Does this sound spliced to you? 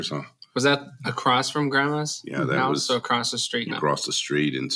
yes; 1 cut; at 3.7 s

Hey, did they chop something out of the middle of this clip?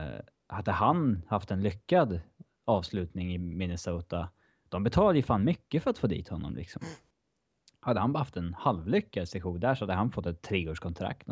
no; 0 cuts

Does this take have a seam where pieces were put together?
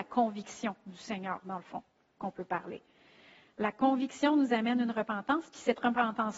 no; 0 cuts

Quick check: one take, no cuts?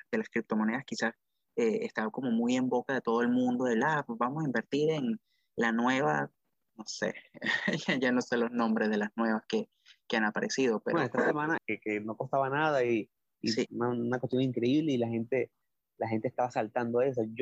no; 2 cuts; at 11.6 s, 13.7 s

